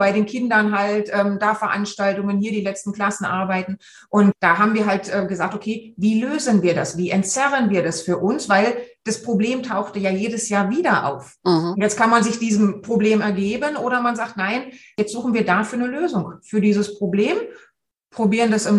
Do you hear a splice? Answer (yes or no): no